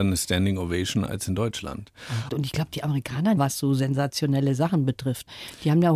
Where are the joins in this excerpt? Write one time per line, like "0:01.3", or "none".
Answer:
0:02.3
0:03.4